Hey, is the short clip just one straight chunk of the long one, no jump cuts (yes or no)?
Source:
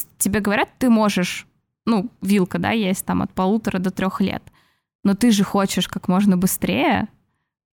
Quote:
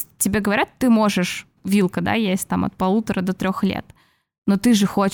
no